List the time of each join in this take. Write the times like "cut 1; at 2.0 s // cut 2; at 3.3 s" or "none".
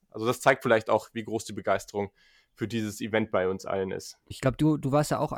cut 1; at 4.3 s